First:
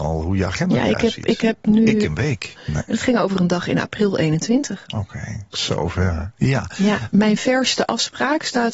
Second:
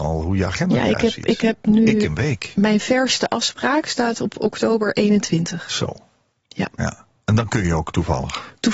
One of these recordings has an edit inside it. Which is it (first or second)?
first